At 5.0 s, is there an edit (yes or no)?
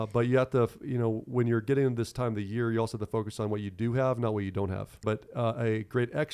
yes